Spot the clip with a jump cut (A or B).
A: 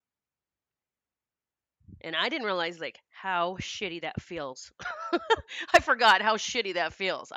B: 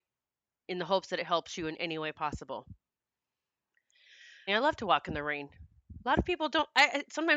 B